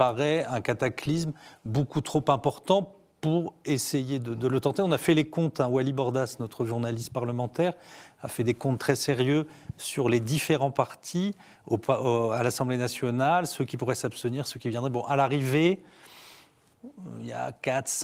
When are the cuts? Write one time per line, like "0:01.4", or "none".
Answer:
none